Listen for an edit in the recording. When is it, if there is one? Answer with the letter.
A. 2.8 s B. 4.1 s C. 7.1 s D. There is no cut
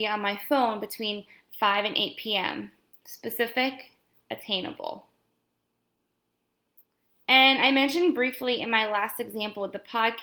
B